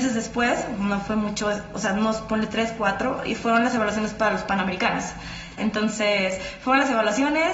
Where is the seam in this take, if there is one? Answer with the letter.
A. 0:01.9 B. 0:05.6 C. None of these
B